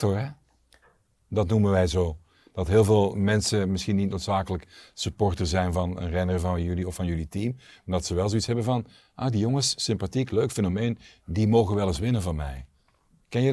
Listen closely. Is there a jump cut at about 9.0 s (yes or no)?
no